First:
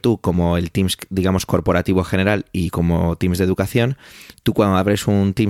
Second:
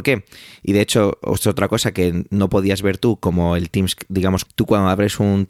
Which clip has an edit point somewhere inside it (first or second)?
second